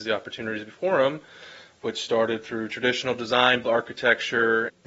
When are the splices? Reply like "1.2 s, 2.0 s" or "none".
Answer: 3.6 s